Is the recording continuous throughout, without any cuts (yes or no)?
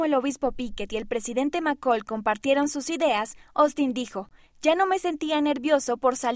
yes